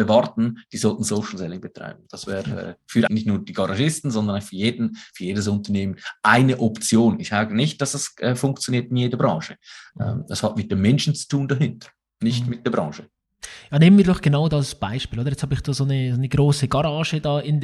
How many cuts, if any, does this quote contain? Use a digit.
1